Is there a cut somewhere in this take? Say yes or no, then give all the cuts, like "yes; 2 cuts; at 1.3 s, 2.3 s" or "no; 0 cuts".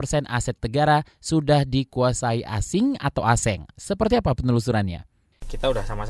no; 0 cuts